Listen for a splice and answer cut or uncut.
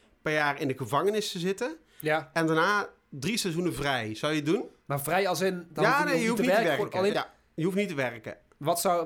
cut